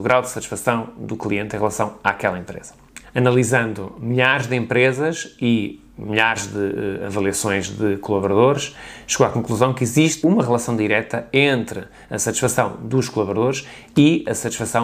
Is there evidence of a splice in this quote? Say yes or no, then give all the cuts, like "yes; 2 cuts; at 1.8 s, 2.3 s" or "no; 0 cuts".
yes; 2 cuts; at 3.0 s, 10.2 s